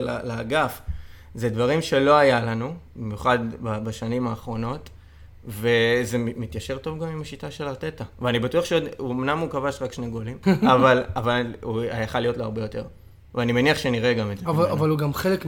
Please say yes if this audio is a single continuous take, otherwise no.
no